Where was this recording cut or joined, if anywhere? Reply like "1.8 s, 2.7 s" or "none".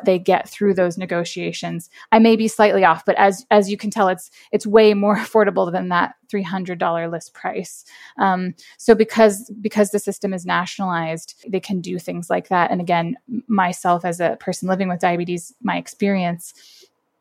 11.4 s